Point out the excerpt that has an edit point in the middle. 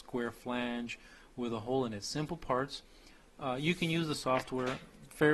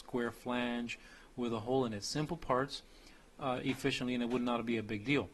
second; 1 cut; at 3.6 s

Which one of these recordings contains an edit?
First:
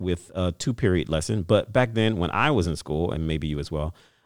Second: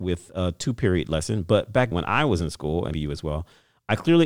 second; 2 cuts; at 1.9 s, 2.9 s

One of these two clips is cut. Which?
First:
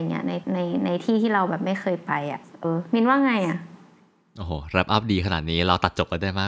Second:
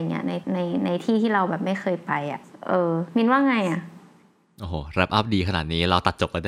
first; 1 cut; at 2.6 s

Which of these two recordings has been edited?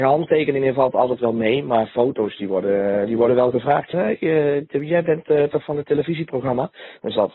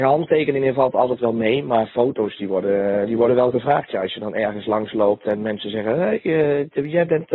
first; 1 cut; at 3.9 s

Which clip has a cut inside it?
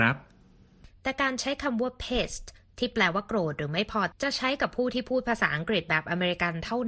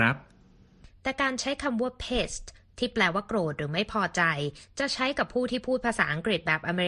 first; 1 cut; at 4.1 s

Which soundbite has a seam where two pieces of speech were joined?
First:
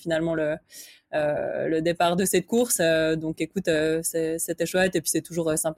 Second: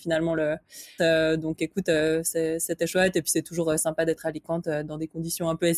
second; 1 cut; at 1.0 s

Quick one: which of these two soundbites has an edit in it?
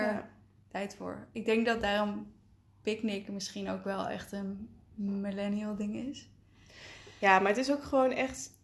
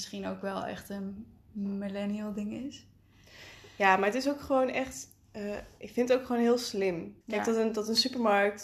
second; 1 cut; at 7.2 s

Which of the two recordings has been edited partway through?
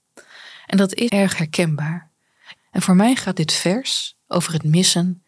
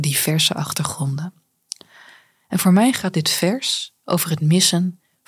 first; 2 cuts; at 1.1 s, 2.6 s

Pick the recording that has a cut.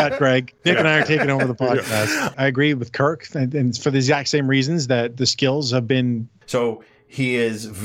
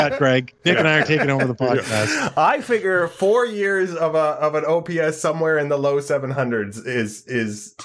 first; 2 cuts; at 2.3 s, 6.4 s

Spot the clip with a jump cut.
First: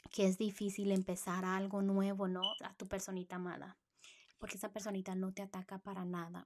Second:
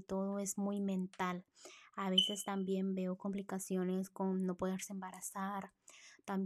first; 1 cut; at 2.6 s

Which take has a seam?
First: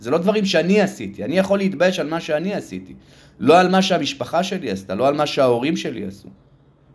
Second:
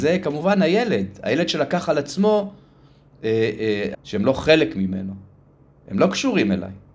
second; 1 cut; at 3.9 s

